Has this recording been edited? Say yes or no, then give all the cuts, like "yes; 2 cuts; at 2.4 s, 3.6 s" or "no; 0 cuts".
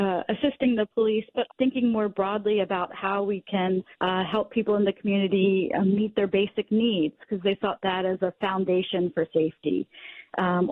yes; 2 cuts; at 1.5 s, 3.9 s